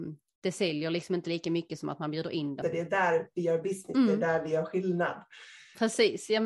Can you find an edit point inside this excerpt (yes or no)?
yes